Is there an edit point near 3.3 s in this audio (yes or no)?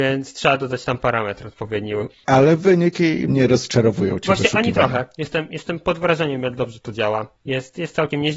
yes